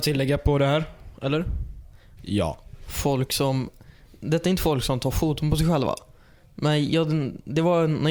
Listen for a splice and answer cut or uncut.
cut